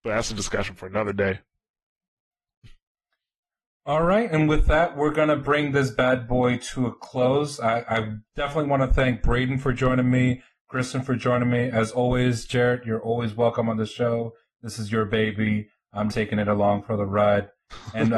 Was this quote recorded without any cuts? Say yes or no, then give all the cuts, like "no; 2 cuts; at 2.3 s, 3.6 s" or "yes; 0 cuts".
no; 1 cut; at 16.1 s